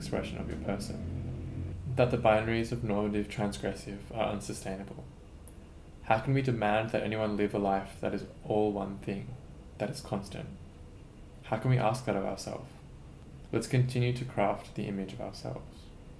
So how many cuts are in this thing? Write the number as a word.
one